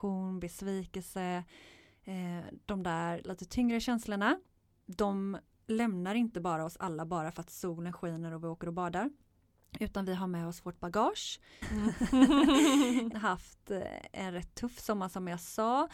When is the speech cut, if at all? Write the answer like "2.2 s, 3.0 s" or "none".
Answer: 11.6 s, 13.1 s